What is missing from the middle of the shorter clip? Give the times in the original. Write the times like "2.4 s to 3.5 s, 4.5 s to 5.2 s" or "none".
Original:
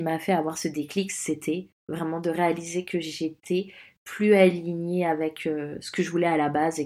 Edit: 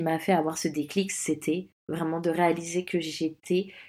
none